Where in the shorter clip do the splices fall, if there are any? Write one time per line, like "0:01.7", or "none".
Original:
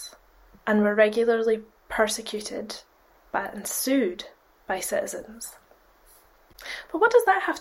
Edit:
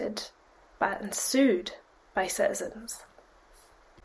none